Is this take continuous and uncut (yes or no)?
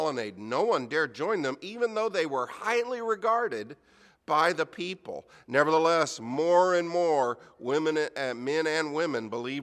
yes